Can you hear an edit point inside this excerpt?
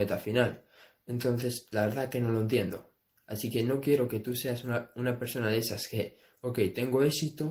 no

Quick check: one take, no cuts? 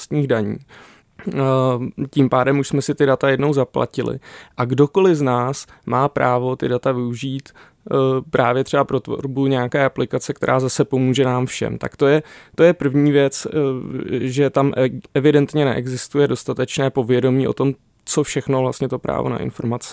yes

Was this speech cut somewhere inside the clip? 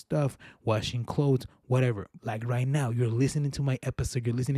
yes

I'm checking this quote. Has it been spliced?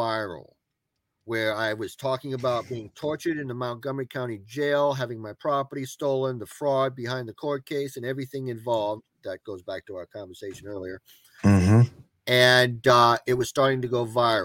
no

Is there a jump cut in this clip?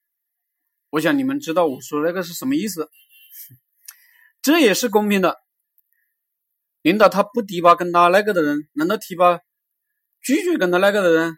no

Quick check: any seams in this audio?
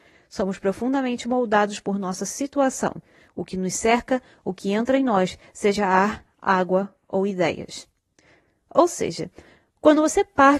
no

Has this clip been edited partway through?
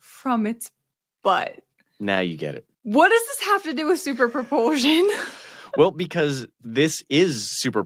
yes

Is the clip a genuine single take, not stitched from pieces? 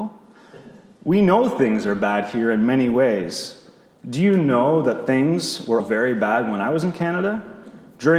no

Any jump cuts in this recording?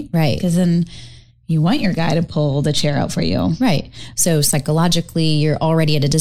yes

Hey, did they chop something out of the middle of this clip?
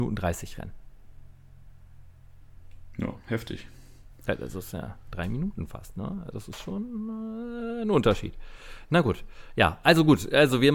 no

